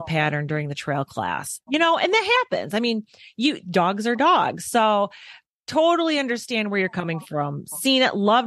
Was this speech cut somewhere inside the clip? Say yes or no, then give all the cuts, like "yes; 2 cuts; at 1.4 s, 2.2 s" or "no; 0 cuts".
yes; 1 cut; at 1.6 s